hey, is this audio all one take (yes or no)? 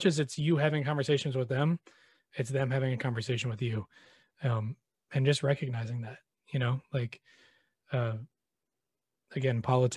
yes